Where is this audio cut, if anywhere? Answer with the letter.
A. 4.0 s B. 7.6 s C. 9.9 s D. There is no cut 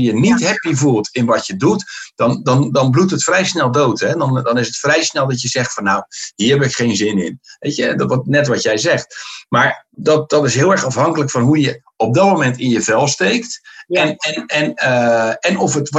C